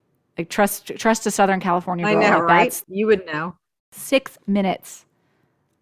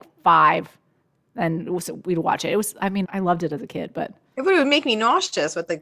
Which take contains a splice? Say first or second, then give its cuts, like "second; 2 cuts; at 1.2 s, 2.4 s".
second; 1 cut; at 3.0 s